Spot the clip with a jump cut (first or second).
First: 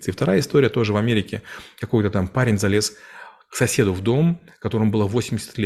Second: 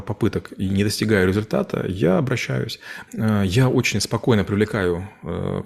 second